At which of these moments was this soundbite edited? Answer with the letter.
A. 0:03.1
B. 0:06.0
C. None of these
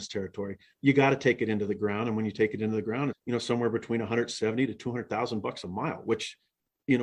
A